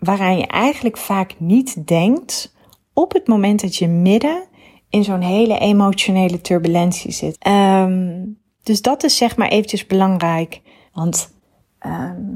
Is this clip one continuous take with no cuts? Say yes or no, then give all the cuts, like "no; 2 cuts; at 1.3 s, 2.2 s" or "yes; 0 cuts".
no; 2 cuts; at 7.3 s, 10.9 s